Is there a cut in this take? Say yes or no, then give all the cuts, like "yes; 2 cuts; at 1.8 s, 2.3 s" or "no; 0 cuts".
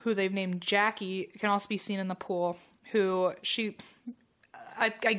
no; 0 cuts